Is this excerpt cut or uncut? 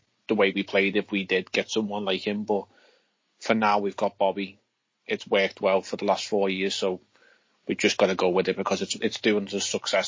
uncut